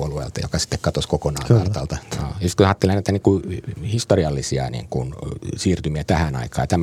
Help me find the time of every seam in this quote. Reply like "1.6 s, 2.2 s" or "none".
2.1 s